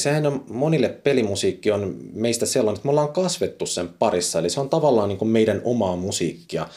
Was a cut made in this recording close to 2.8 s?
no; 0 cuts

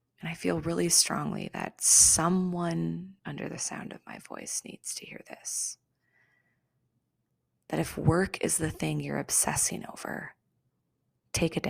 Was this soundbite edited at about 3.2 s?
yes; 1 cut; at 3.2 s

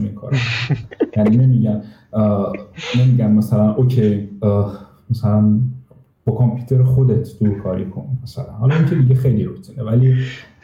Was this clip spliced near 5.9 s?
no; 0 cuts

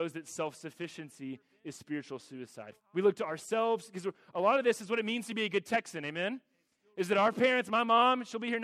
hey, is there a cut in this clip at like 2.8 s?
yes; 1 cut; at 2.8 s

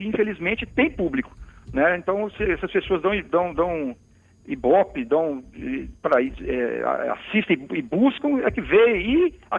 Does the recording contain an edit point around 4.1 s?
no; 0 cuts

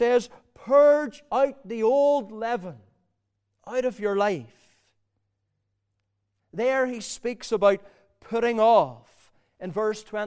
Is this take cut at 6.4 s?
yes; 1 cut; at 6.4 s

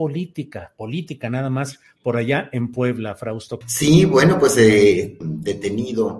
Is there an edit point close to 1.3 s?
no; 2 cuts; at 3.6 s, 5.2 s

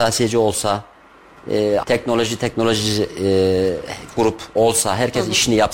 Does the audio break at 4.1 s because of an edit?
yes; 2 cuts; at 1.8 s, 4.1 s

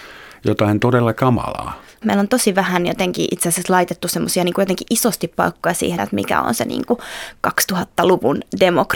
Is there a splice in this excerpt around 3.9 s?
no; 2 cuts; at 2.0 s, 6.0 s

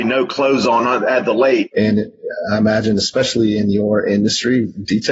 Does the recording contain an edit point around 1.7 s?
yes; 1 cut; at 1.7 s

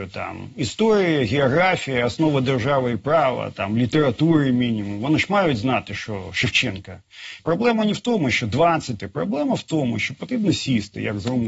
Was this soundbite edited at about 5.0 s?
no; 2 cuts; at 7.4 s, 9.0 s

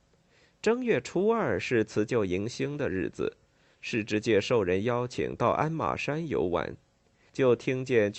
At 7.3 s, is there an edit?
yes; 1 cut; at 7.3 s

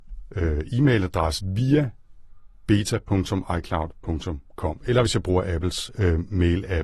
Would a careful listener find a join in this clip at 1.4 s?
yes; 1 cut; at 1.4 s

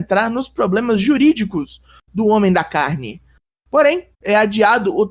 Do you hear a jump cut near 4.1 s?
yes; 1 cut; at 4.1 s

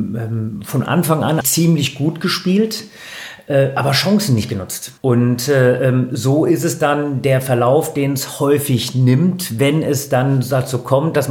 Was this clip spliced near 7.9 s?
no; 2 cuts; at 1.4 s, 5.0 s

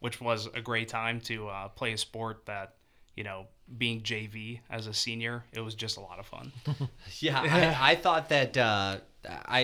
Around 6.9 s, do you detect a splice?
no; 0 cuts

